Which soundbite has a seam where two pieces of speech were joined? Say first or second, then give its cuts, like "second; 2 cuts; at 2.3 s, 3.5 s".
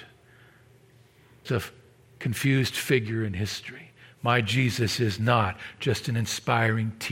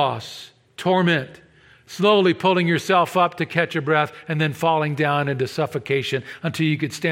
first; 1 cut; at 1.5 s